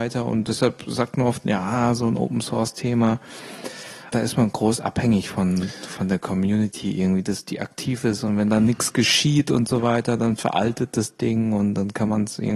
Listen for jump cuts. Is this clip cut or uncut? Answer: cut